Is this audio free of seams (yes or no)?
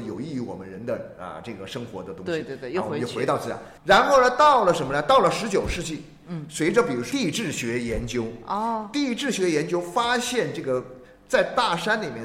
no